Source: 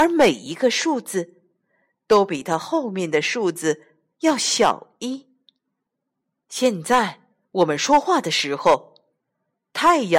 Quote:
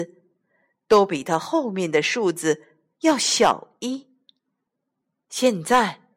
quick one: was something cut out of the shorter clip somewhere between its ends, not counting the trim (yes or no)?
no